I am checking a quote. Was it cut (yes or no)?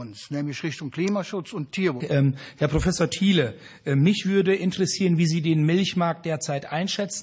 yes